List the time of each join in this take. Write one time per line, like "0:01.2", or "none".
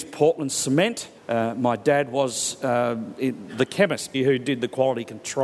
0:01.2
0:04.1